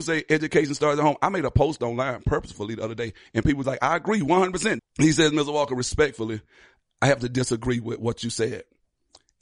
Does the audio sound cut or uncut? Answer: cut